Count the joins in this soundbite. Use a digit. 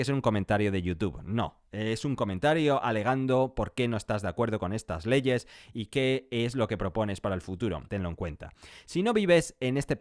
1